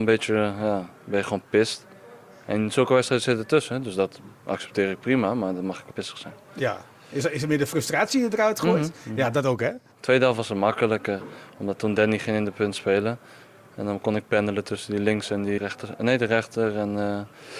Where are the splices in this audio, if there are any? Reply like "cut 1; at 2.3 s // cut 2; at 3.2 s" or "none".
cut 1; at 5.9 s // cut 2; at 15.6 s